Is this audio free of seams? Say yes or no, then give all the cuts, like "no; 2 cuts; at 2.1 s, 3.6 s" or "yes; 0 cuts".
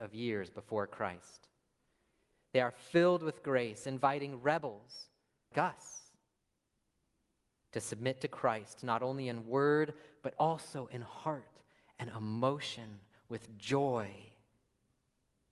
no; 1 cut; at 5.5 s